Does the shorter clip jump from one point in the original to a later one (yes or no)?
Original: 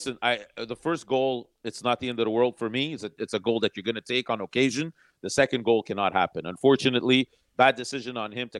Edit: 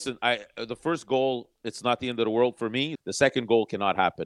yes